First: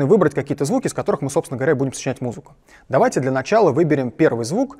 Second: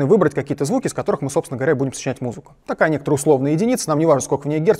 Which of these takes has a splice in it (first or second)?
second